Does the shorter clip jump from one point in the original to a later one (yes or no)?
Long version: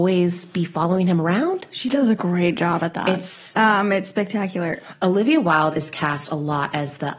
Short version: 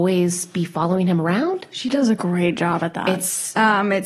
no